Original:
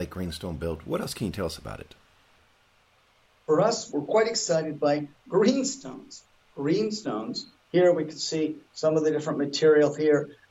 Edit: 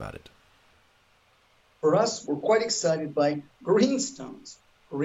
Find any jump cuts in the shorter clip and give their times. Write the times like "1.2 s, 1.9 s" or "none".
none